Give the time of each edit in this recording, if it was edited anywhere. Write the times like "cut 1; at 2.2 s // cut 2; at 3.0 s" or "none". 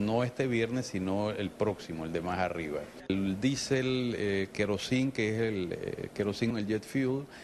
cut 1; at 3.1 s // cut 2; at 6.5 s